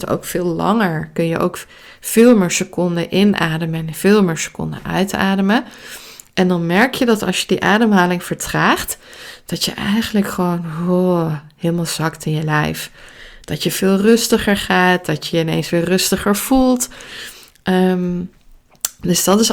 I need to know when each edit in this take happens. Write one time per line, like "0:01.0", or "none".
none